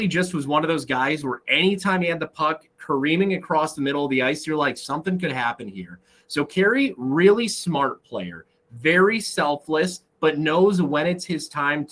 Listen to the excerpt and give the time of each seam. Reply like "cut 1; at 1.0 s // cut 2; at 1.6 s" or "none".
none